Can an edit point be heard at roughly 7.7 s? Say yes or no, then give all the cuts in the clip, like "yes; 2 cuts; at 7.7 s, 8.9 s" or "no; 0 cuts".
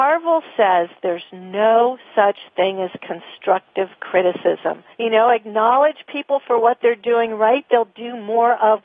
no; 1 cut; at 4.9 s